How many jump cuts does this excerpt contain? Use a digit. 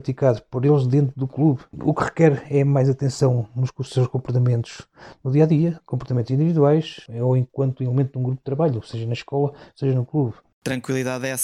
1